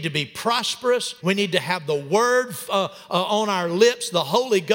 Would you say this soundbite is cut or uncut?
cut